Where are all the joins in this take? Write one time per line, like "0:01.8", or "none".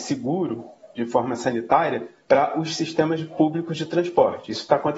0:02.2